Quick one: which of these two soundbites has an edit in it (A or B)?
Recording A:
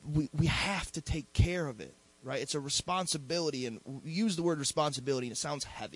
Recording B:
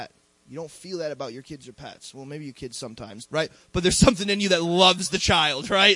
B